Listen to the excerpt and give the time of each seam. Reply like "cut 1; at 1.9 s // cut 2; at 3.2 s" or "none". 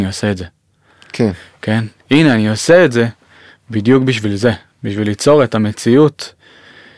none

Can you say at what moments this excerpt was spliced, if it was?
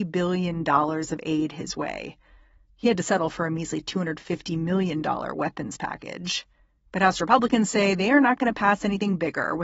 cut 1; at 2.6 s // cut 2; at 6.9 s

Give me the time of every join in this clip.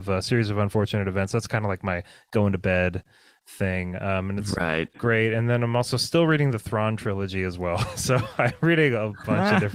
none

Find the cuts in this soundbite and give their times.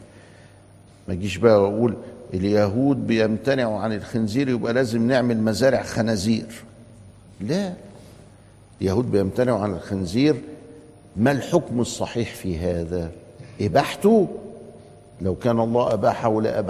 none

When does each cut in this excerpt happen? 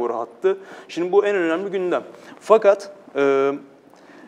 none

